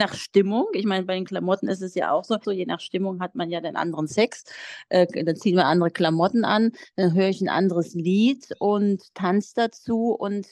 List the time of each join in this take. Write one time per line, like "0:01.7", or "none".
0:02.4